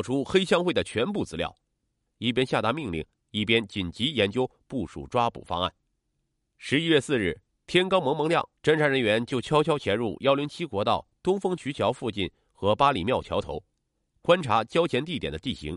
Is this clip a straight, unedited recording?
no; 2 cuts; at 2.1 s, 8.6 s

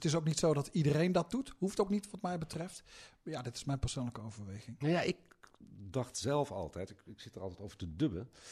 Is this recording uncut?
yes; 0 cuts

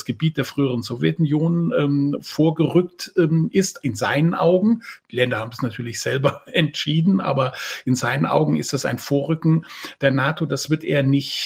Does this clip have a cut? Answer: no; 0 cuts

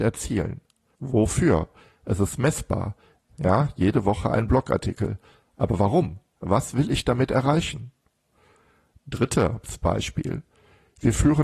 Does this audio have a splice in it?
yes; 1 cut; at 0.9 s

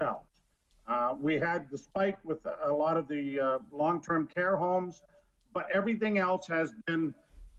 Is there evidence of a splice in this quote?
no; 0 cuts

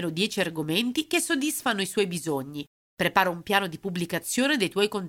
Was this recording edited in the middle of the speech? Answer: yes; 1 cut; at 2.8 s

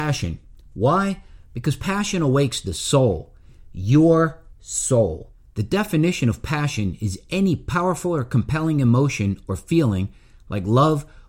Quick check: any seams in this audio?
no; 0 cuts

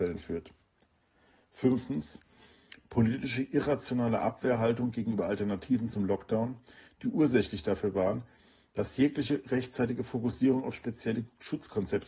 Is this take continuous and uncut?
yes; 0 cuts

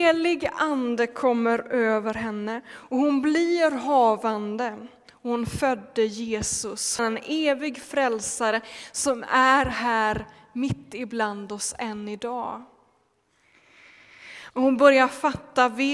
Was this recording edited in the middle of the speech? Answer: yes; 2 cuts; at 7.0 s, 14.5 s

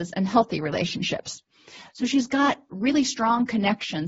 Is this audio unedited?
no; 1 cut; at 1.9 s

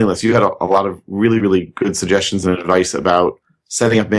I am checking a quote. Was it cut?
no; 0 cuts

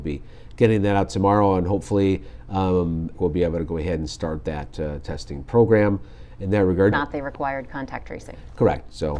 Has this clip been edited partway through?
yes; 2 cuts; at 3.1 s, 6.9 s

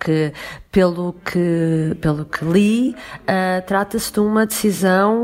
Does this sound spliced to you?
no; 0 cuts

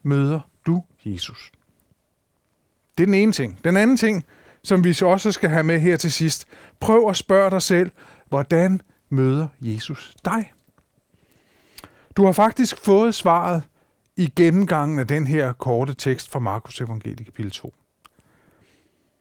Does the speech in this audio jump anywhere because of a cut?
no; 0 cuts

